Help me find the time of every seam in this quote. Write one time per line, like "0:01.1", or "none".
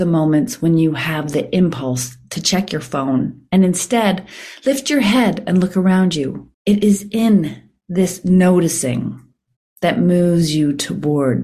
0:06.5